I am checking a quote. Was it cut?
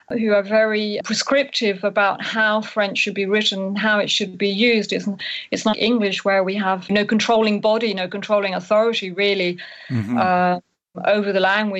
yes; 2 cuts; at 5.7 s, 6.9 s

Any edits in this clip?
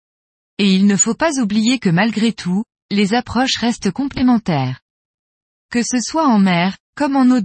no; 0 cuts

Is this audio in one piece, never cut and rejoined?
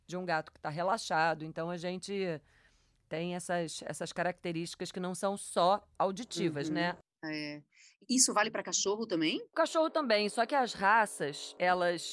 yes; 0 cuts

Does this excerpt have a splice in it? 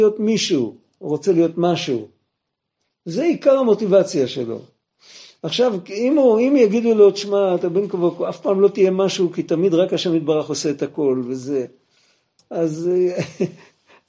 no; 0 cuts

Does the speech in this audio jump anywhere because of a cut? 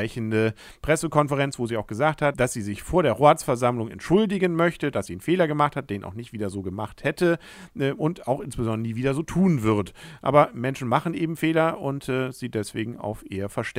no; 0 cuts

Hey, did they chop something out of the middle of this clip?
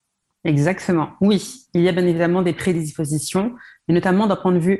no; 0 cuts

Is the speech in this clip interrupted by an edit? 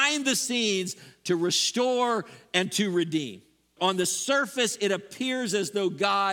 yes; 1 cut; at 3.8 s

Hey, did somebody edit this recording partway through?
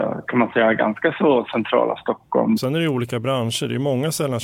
yes; 1 cut; at 2.6 s

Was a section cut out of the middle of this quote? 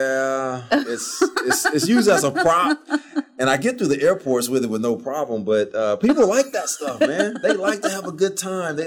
no; 0 cuts

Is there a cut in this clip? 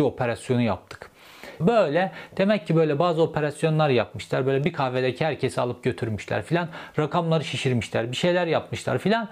yes; 1 cut; at 1.6 s

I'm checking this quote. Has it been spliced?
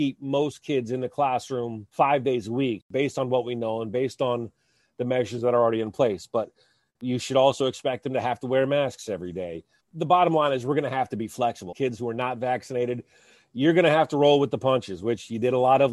yes; 2 cuts; at 9.8 s, 11.7 s

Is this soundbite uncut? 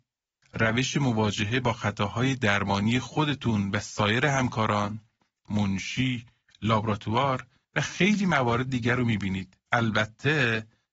no; 2 cuts; at 5.5 s, 9.7 s

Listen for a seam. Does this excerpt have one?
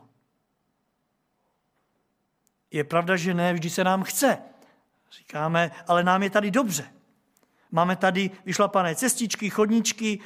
no; 0 cuts

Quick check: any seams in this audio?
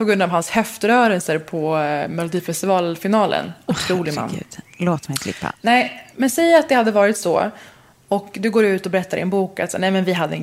no; 0 cuts

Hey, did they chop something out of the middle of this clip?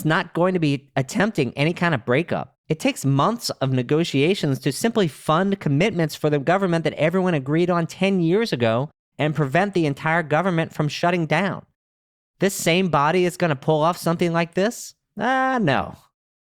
yes; 1 cut; at 2.6 s

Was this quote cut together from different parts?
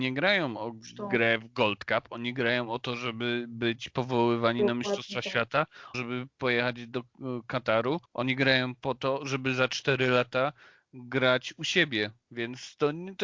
yes; 2 cuts; at 5.9 s, 8.0 s

